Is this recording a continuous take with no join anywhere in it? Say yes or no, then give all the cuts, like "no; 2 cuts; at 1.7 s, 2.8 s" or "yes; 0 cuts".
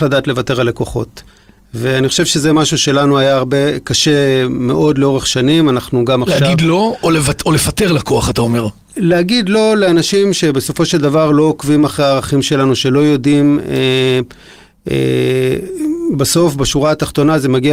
yes; 0 cuts